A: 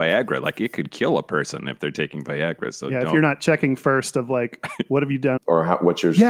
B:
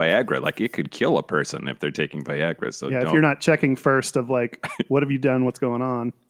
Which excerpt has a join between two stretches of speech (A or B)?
A